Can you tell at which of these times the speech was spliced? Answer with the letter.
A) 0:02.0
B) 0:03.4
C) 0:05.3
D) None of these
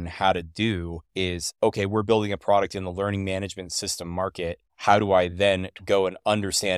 D